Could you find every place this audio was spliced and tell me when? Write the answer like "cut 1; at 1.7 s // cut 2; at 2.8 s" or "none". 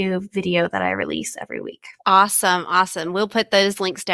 cut 1; at 2.0 s